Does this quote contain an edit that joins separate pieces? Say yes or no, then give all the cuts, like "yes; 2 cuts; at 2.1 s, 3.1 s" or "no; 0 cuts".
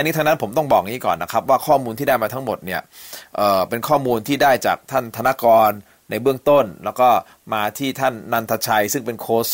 no; 0 cuts